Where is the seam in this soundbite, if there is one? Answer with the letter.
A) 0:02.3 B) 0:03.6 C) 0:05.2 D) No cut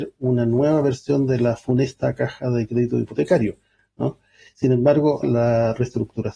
C